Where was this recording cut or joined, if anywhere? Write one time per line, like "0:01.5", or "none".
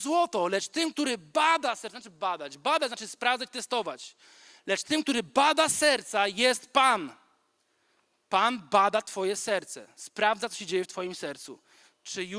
none